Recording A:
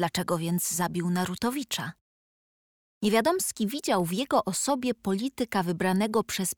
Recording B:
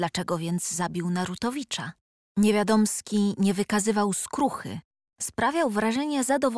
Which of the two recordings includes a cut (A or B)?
B